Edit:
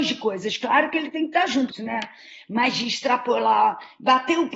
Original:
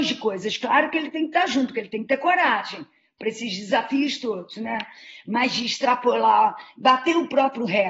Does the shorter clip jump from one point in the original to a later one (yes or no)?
yes